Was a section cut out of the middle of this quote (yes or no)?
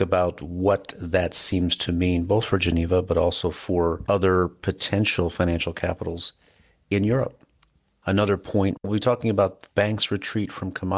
no